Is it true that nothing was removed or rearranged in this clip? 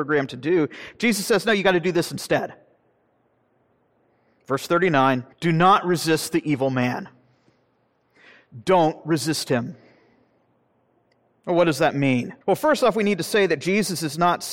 no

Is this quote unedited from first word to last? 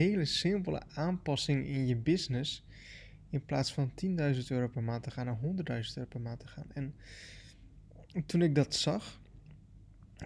yes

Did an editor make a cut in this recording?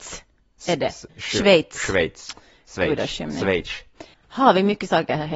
yes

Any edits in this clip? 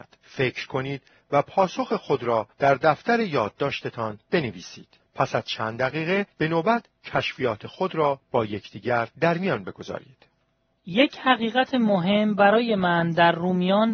no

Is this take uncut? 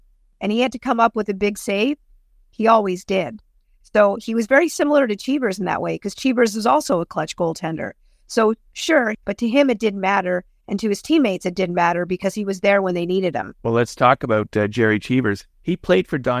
no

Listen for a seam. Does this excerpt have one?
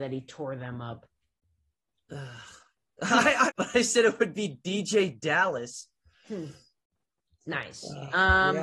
yes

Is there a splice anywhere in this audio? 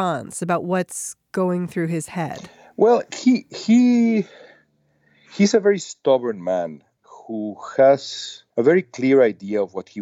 yes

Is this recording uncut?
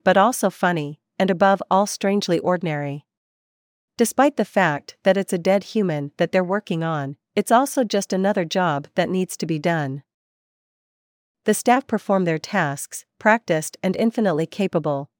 yes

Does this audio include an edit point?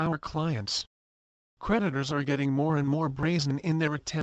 yes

